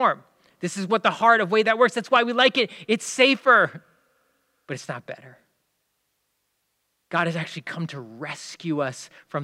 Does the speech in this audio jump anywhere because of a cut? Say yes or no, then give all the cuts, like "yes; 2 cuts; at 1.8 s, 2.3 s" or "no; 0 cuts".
no; 0 cuts